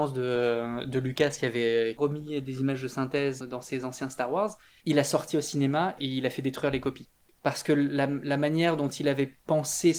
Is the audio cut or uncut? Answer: cut